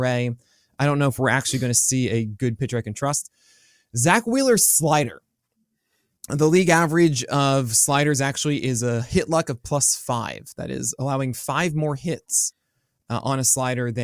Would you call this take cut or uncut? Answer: uncut